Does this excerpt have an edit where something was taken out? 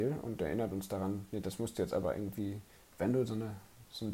no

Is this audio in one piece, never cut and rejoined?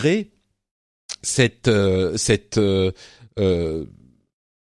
yes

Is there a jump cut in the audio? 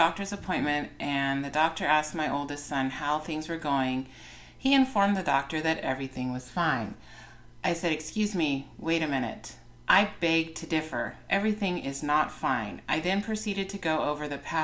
no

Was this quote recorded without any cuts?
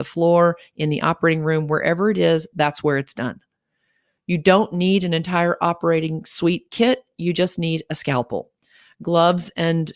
yes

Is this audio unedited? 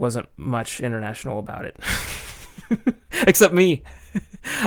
yes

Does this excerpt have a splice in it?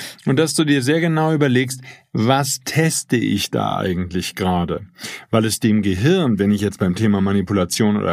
no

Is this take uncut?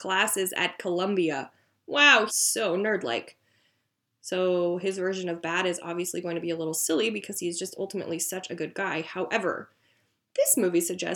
no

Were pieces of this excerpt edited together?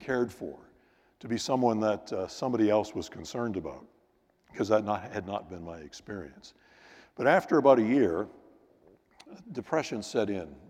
no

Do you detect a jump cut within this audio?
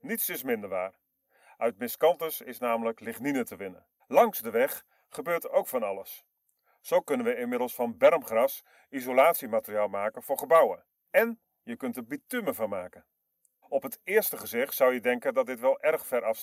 yes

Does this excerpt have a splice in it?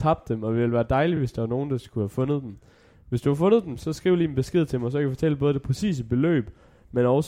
no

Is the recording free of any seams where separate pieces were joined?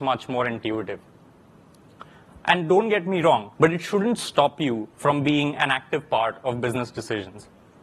no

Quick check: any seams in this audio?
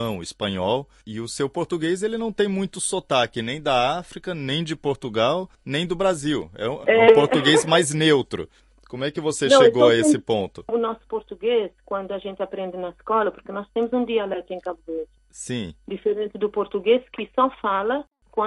yes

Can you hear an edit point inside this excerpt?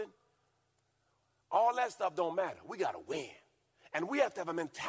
no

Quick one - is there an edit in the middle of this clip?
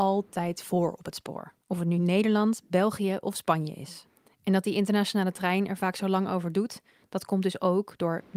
yes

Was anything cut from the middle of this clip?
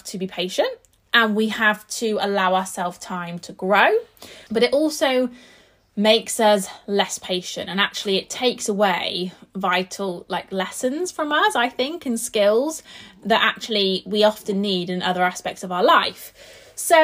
yes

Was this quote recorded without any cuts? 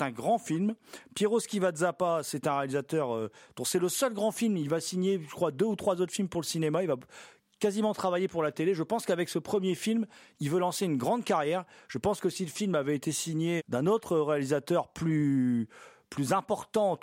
no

